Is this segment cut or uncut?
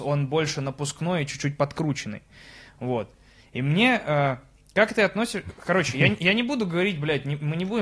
uncut